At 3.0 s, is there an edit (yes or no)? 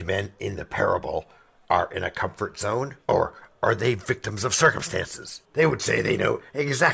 yes